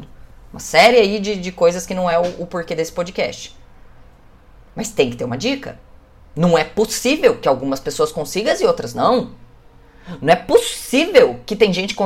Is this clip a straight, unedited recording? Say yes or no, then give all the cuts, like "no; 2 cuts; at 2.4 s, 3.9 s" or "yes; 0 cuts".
yes; 0 cuts